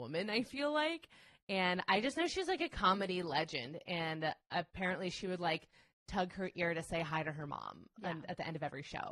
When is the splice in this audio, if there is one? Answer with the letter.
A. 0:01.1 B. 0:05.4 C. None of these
C